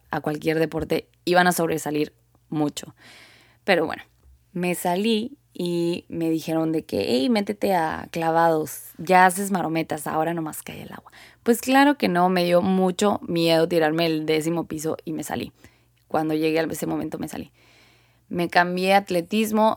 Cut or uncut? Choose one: uncut